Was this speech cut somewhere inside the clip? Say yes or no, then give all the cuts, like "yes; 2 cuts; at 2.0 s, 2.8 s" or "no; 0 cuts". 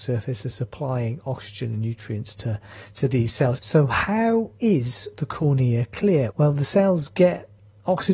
yes; 2 cuts; at 3.6 s, 6.3 s